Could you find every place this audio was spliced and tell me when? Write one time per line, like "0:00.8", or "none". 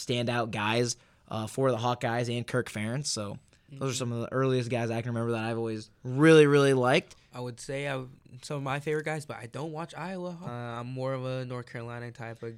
0:05.9
0:10.5